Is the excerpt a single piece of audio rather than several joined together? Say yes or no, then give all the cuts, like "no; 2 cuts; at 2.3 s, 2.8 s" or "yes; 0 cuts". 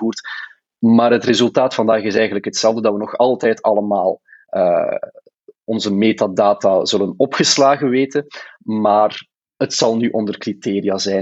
yes; 0 cuts